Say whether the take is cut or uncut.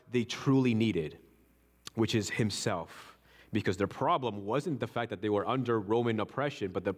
uncut